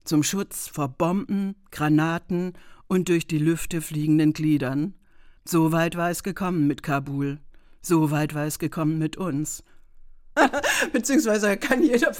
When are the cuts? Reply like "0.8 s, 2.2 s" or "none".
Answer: 5.4 s, 10.4 s